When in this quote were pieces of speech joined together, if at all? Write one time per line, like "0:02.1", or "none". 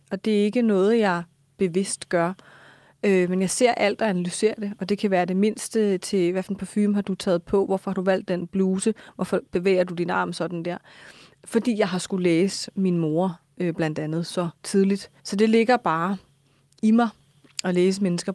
0:07.7
0:15.2

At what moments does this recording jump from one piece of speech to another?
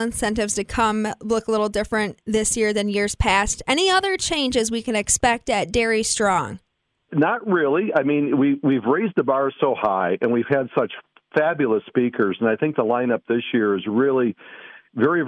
none

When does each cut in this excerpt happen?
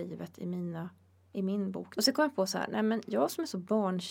0:02.0

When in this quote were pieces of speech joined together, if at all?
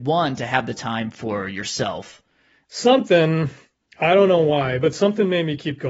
0:02.6

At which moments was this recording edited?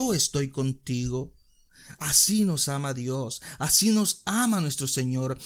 none

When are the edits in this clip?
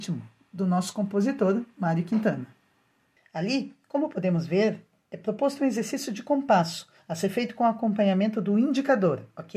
0:03.2

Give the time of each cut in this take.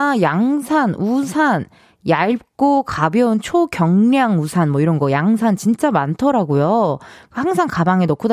none

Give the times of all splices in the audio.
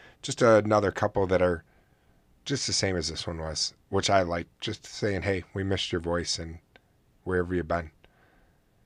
none

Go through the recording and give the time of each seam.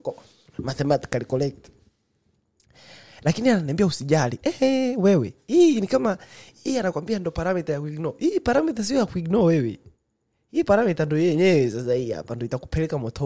none

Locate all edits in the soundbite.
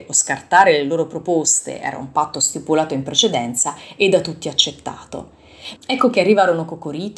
0:05.8

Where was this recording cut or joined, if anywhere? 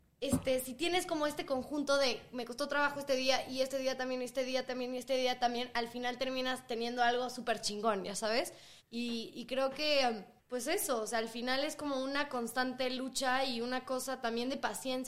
0:08.8
0:10.4

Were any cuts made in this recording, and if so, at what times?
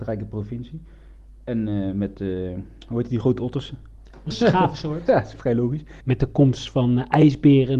0:04.3
0:06.0

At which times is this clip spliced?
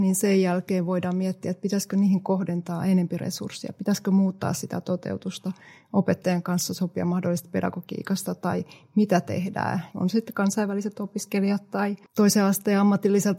0:09.9

